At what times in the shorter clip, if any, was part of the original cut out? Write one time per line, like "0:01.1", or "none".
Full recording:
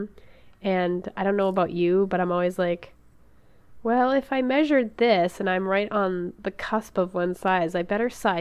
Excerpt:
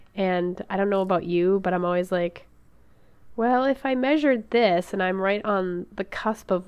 none